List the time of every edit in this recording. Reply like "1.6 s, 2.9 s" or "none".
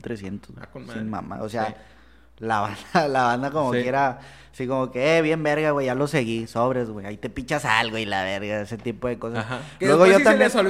none